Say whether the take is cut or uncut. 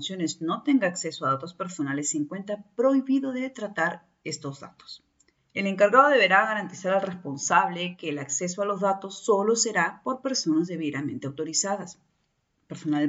cut